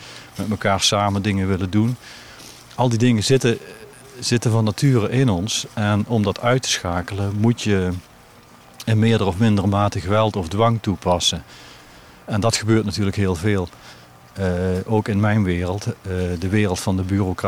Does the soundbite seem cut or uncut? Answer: uncut